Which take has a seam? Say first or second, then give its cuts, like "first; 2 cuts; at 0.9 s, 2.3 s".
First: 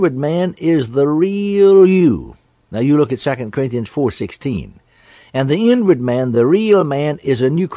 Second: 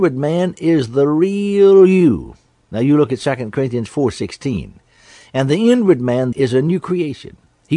second; 1 cut; at 6.3 s